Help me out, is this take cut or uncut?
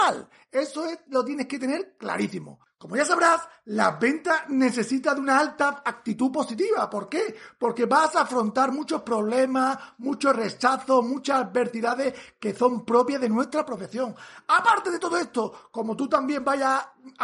uncut